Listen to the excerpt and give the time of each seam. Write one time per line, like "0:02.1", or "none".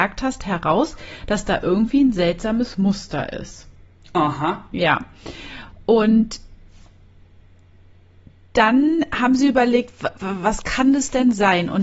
none